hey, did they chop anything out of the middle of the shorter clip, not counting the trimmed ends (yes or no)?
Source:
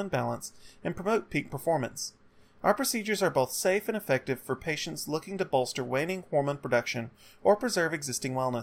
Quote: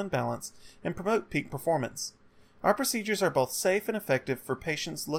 no